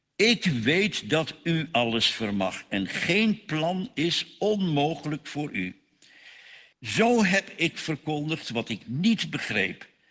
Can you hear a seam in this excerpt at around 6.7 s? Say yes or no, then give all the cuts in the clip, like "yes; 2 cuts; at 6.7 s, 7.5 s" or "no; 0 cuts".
yes; 1 cut; at 6.7 s